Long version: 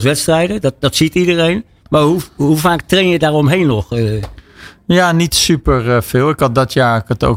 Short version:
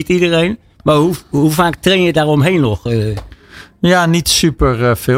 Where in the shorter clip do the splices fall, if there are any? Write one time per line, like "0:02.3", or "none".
none